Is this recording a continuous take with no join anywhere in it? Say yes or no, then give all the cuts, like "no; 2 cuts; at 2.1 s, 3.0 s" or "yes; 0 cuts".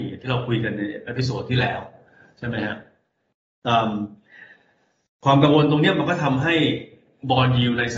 yes; 0 cuts